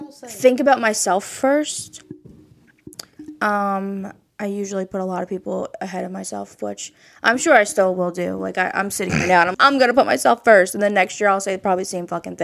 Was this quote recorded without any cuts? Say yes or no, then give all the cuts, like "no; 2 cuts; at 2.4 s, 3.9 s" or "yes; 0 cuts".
no; 1 cut; at 9.5 s